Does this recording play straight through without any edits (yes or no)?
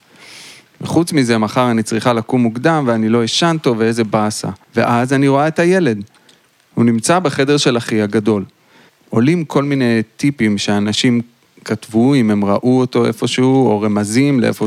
no